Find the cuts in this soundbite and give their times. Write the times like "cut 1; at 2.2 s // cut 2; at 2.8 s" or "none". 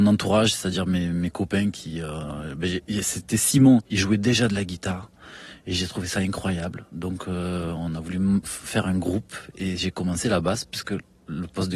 none